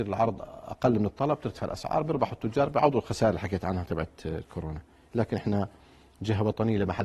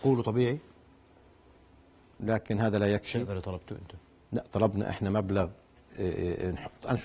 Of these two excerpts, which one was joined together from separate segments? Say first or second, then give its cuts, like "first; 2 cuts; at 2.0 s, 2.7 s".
second; 1 cut; at 2.2 s